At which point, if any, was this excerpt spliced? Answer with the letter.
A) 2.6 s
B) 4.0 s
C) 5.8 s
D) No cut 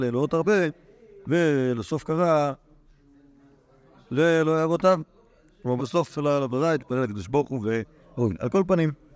C